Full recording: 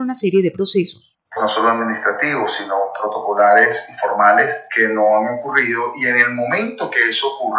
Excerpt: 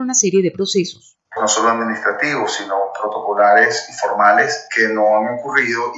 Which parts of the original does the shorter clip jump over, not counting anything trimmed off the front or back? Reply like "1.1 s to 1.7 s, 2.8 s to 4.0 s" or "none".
none